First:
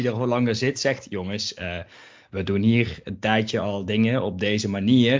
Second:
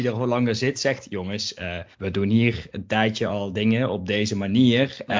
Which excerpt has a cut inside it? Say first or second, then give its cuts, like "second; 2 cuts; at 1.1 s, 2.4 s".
second; 1 cut; at 1.9 s